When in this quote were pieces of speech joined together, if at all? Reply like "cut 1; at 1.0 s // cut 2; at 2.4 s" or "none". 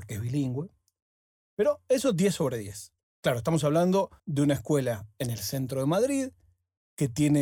cut 1; at 3.0 s // cut 2; at 4.2 s